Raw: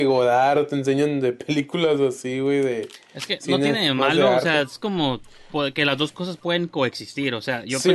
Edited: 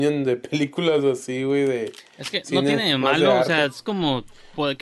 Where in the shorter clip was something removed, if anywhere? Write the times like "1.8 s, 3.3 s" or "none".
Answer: none

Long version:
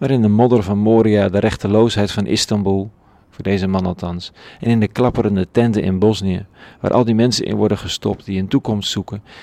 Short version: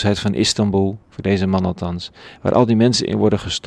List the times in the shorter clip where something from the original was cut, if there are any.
1.0 s, 2.4 s

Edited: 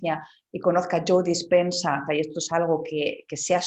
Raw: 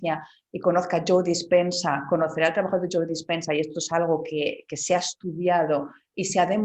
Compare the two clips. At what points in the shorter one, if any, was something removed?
2.1 s

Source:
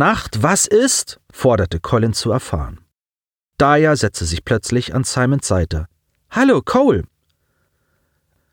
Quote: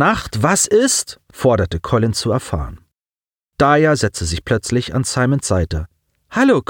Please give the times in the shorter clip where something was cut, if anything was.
none

